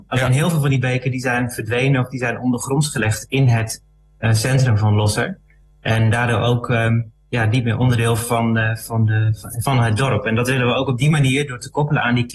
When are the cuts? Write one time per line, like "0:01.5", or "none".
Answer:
none

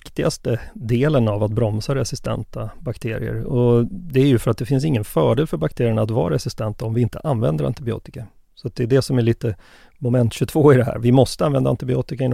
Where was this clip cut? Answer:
none

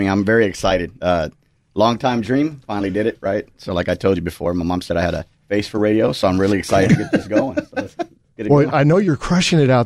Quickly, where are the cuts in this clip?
0:05.4

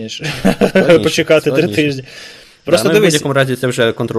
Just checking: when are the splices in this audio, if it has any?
none

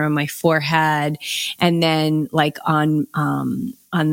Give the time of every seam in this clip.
none

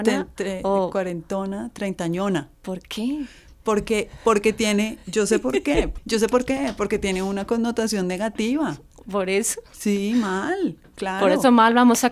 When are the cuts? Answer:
none

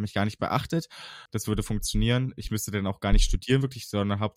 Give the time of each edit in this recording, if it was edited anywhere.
0:01.3

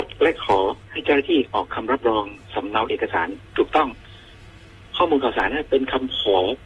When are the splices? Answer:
none

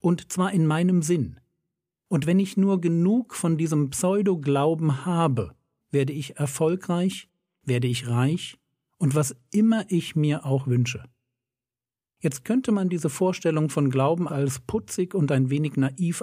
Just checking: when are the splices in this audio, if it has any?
0:05.8
0:14.3

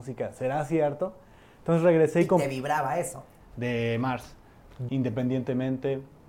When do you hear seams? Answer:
0:03.4
0:04.9

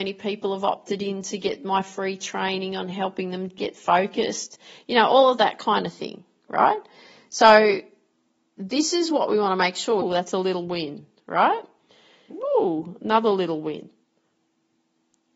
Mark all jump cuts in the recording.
0:10.0
0:12.3

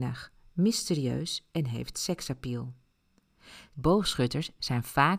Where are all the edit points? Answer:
0:03.7

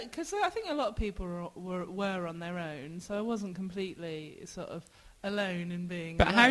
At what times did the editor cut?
none

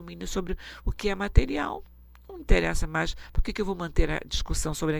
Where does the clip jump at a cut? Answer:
none

